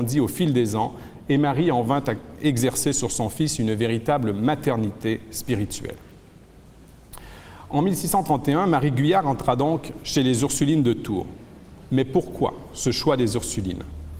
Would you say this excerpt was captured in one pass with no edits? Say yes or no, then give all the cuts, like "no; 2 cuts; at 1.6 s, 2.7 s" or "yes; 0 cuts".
yes; 0 cuts